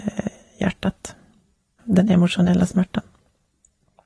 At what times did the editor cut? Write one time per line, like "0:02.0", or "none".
0:01.8